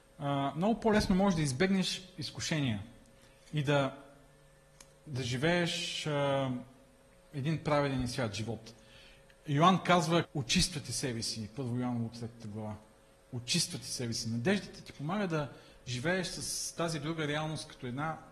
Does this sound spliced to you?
yes; 1 cut; at 10.2 s

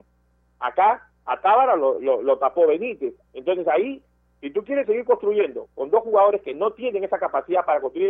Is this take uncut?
no; 1 cut; at 3.2 s

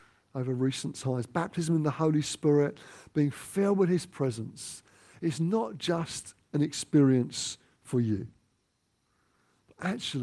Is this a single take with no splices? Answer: yes; 0 cuts

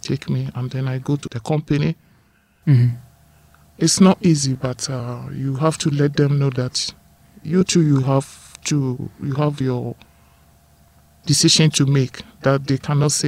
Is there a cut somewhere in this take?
yes; 1 cut; at 2.6 s

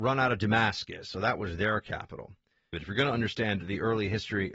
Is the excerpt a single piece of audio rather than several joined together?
no; 1 cut; at 2.7 s

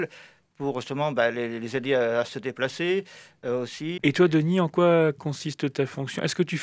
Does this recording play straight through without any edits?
no; 1 cut; at 4.0 s

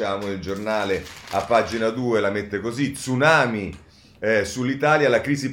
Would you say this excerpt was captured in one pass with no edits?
yes; 0 cuts

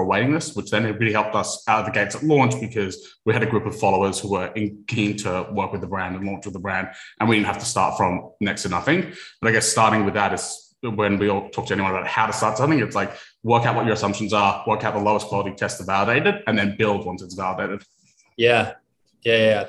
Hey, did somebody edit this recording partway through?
no; 0 cuts

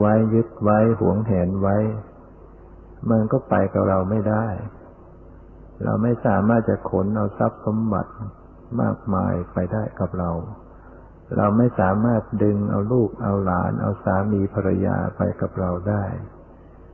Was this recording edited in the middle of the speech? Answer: no; 0 cuts

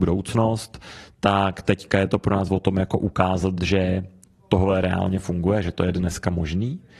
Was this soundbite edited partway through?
no; 0 cuts

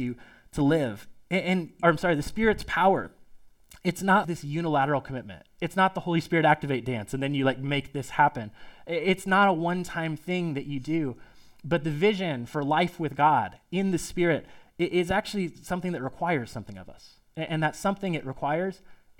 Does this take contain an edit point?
yes; 2 cuts; at 1.8 s, 4.2 s

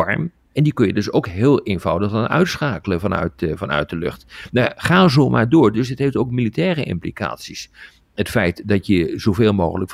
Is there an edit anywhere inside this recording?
no; 0 cuts

